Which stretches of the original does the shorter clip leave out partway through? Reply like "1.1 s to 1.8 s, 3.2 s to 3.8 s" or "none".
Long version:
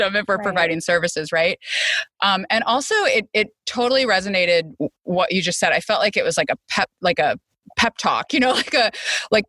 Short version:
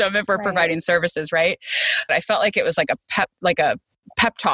2.1 s to 5.7 s